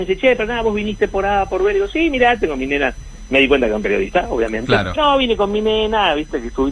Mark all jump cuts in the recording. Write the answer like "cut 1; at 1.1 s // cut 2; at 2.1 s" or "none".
cut 1; at 5.0 s